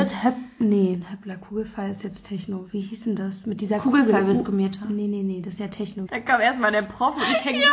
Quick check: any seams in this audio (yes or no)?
yes